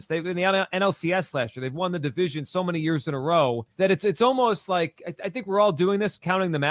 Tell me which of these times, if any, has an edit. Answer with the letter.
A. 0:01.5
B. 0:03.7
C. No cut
B